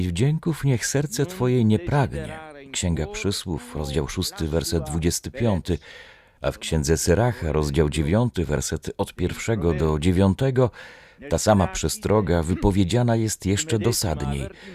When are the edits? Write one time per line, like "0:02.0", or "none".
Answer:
none